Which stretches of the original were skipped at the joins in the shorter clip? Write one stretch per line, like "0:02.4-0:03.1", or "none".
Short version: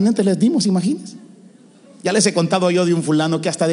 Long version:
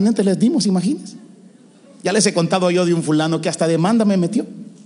none